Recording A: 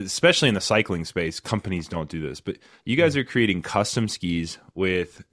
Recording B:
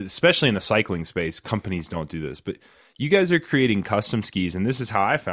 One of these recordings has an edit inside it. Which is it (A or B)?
A